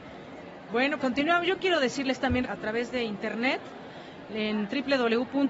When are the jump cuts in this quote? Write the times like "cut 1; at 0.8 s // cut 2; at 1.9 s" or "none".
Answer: cut 1; at 1.0 s // cut 2; at 2.4 s